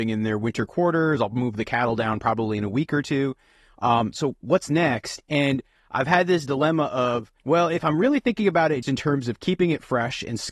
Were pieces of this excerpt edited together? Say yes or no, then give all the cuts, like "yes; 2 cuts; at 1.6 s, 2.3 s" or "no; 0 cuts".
yes; 2 cuts; at 7.4 s, 8.8 s